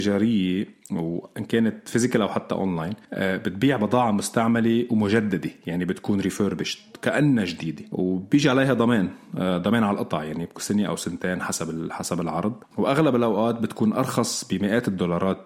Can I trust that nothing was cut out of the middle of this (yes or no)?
yes